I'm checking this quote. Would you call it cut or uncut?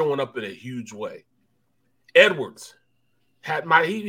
uncut